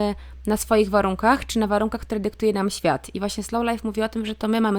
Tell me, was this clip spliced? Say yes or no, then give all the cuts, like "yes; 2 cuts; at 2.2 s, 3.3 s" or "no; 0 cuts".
no; 0 cuts